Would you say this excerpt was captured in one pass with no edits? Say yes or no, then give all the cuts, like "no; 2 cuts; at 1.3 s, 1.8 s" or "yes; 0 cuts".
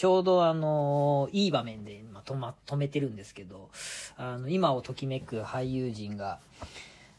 yes; 0 cuts